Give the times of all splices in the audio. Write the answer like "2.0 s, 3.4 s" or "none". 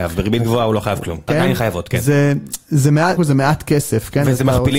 1.3 s, 3.2 s